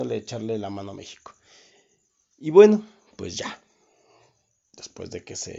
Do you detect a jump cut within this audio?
no; 0 cuts

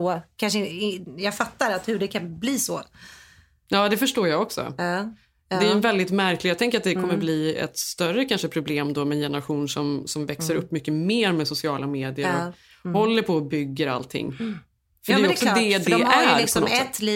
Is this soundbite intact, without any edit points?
yes; 0 cuts

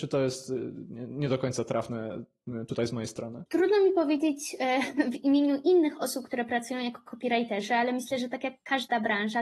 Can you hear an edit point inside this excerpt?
no; 0 cuts

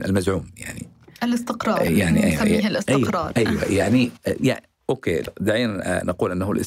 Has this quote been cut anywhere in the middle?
no; 0 cuts

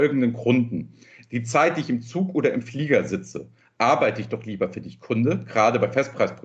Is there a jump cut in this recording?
no; 0 cuts

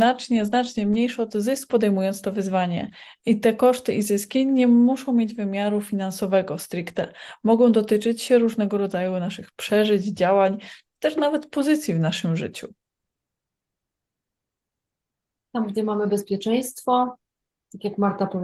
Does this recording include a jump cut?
yes; 1 cut; at 1.7 s

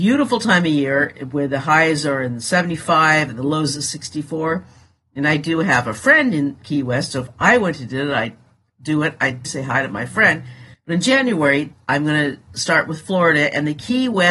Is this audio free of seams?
no; 2 cuts; at 9.4 s, 10.7 s

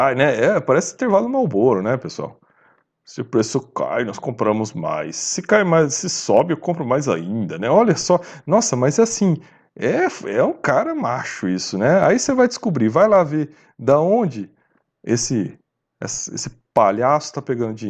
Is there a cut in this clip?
no; 0 cuts

